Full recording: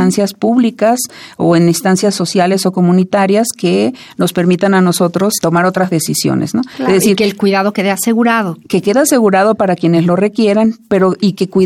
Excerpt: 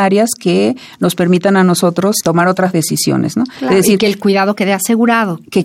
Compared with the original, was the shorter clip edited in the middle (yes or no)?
no